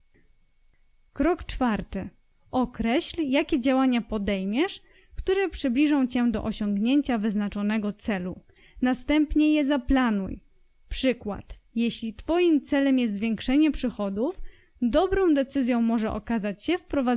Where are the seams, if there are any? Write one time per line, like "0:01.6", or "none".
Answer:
0:02.3